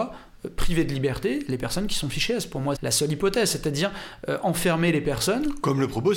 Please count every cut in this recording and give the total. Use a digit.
1